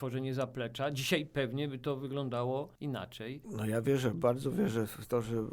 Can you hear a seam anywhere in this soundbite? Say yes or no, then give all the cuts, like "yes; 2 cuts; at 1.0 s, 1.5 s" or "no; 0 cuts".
yes; 1 cut; at 3.4 s